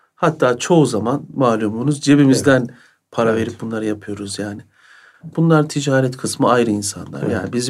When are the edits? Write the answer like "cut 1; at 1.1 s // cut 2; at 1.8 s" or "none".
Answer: cut 1; at 5.3 s